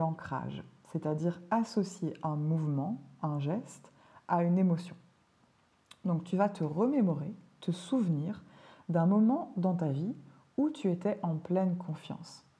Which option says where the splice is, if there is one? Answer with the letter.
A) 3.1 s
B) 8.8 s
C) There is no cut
C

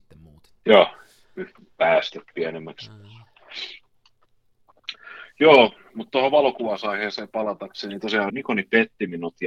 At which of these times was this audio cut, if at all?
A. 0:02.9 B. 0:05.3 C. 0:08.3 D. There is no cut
C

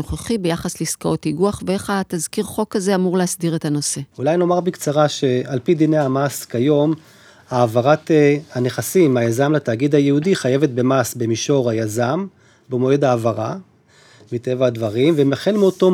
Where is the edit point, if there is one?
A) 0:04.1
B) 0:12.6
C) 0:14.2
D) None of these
A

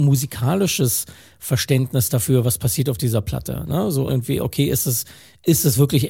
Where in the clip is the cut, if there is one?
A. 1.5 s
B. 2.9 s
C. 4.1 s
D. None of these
C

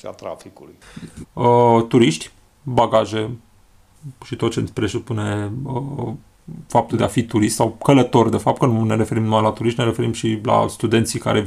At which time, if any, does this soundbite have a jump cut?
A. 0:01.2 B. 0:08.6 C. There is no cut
A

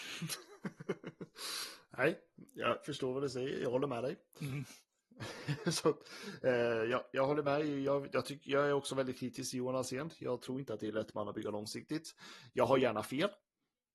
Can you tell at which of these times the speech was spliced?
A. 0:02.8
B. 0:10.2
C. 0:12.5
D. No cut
A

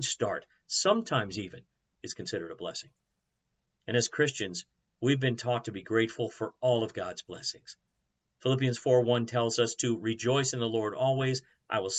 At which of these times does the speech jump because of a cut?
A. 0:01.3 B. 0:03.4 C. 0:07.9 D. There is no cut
D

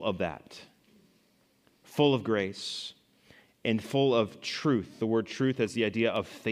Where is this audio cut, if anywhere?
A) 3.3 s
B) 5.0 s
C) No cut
C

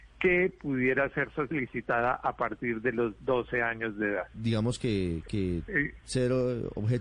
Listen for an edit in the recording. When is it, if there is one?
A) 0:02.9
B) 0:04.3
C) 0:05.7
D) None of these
B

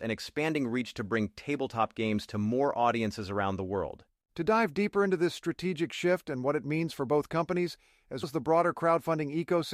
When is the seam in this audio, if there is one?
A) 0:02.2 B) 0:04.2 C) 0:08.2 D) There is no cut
C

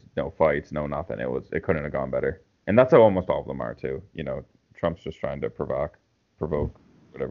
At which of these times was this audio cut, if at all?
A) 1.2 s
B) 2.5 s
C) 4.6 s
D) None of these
D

